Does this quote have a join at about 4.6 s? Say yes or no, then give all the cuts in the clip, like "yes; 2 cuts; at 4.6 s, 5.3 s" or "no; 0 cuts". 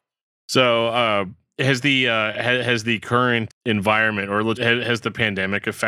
yes; 2 cuts; at 3.5 s, 4.6 s